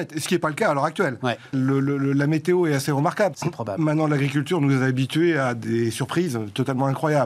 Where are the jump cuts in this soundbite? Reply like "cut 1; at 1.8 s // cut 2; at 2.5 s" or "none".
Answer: cut 1; at 1.5 s // cut 2; at 3.3 s